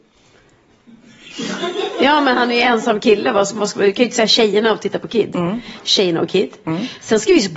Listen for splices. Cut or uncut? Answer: uncut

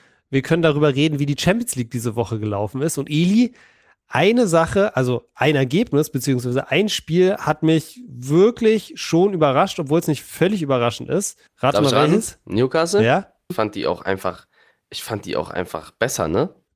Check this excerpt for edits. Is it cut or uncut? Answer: cut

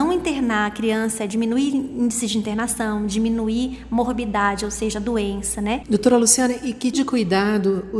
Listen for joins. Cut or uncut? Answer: cut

